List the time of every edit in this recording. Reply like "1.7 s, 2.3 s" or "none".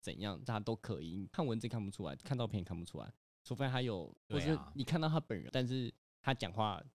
4.1 s, 5.5 s